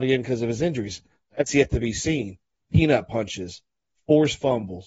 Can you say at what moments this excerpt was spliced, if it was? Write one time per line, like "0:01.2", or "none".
0:02.5